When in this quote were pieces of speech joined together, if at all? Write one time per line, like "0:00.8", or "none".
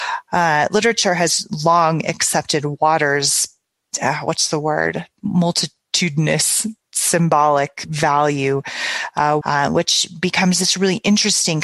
0:05.2
0:09.4

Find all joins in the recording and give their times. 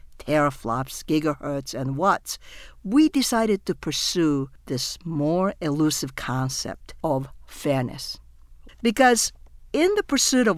0:08.7

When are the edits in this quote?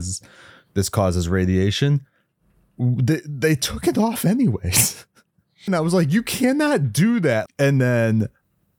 0:05.7
0:07.5

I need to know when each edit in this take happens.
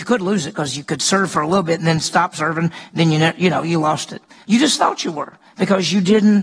0:04.4

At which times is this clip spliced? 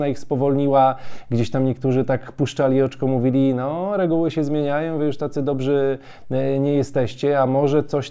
none

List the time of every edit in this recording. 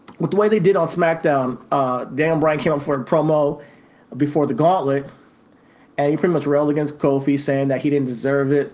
none

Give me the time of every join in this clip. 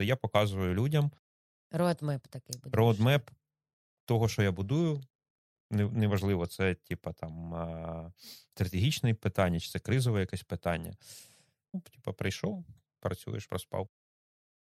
0:11.7
0:13.5

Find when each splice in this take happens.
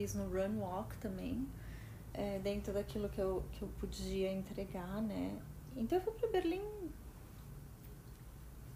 0:02.1

